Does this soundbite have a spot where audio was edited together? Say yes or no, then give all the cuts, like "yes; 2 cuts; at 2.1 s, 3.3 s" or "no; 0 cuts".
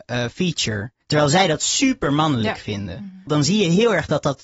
yes; 2 cuts; at 1.0 s, 3.3 s